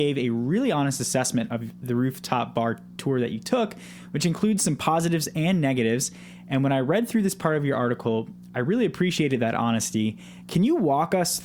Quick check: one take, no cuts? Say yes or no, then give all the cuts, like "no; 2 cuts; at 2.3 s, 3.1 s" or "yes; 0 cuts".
yes; 0 cuts